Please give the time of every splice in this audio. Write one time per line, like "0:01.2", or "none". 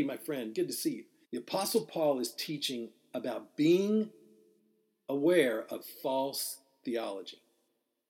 0:01.2